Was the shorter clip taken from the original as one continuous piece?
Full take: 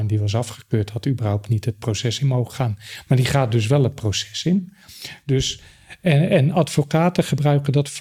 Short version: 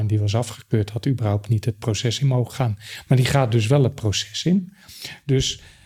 yes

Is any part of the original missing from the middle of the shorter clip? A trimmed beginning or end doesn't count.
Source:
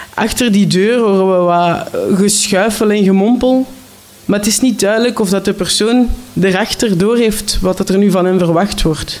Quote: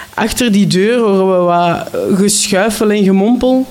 no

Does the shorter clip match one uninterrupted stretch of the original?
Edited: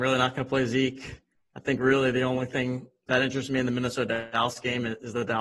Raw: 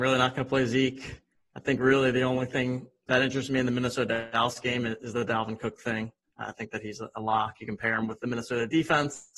yes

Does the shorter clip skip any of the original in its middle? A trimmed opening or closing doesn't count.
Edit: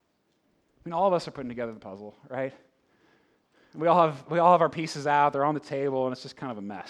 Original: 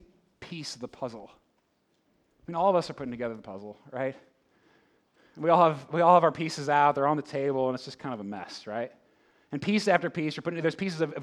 no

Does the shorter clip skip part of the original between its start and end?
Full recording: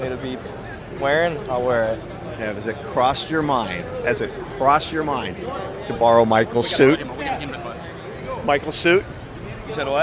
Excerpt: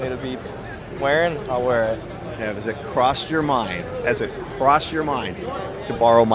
no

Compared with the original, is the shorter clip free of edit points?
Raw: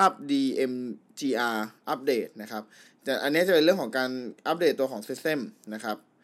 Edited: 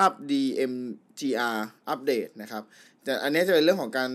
yes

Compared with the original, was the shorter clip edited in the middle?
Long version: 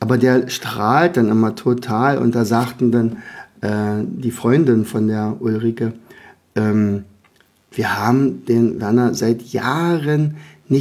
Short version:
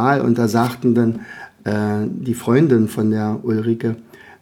no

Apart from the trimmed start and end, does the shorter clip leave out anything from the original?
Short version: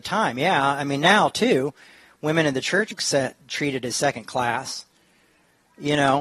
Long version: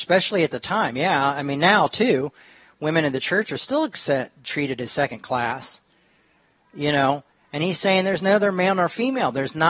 yes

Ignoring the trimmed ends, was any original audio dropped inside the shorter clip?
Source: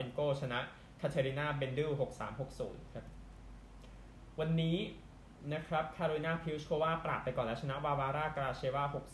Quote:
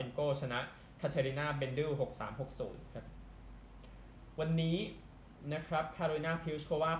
no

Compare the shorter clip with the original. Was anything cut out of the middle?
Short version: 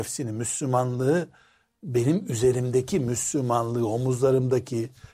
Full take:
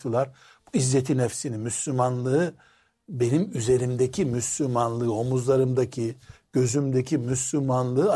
no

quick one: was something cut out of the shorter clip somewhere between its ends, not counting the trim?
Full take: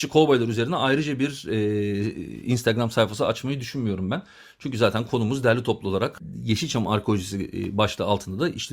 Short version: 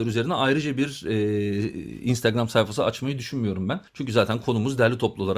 yes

